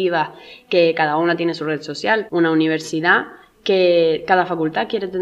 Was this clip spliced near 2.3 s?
yes; 1 cut; at 2.3 s

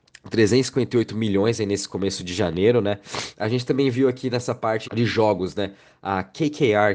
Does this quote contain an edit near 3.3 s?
yes; 2 cuts; at 3.3 s, 4.8 s

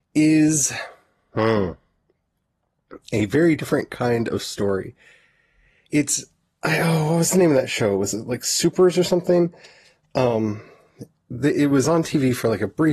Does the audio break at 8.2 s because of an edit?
no; 0 cuts

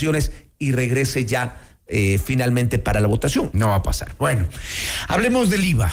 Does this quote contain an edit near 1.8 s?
no; 1 cut; at 3.5 s

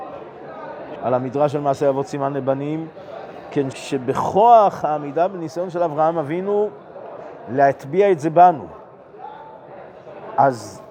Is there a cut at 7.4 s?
no; 2 cuts; at 1.0 s, 3.7 s

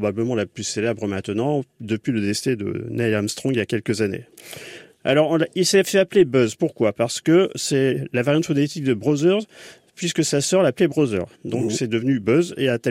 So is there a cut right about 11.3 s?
yes; 1 cut; at 11.3 s

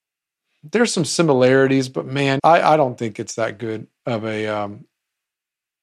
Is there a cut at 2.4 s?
yes; 1 cut; at 2.4 s

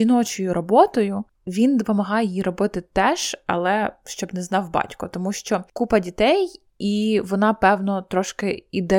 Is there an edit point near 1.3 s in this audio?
no; 1 cut; at 6.7 s

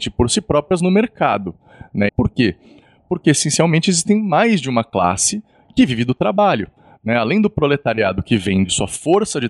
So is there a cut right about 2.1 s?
yes; 1 cut; at 2.1 s

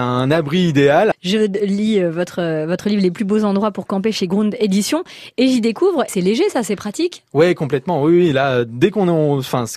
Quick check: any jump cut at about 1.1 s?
yes; 2 cuts; at 1.1 s, 6.1 s

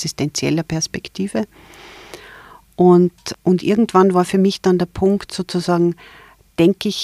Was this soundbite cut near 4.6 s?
no; 1 cut; at 3.3 s

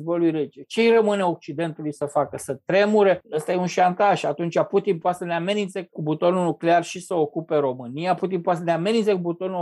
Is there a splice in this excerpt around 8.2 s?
yes; 2 cuts; at 3.2 s, 8.2 s

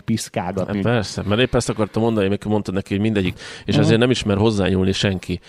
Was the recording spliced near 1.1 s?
no; 1 cut; at 3.3 s

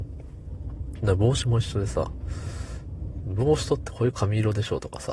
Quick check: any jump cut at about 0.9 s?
no; 1 cut; at 3.9 s

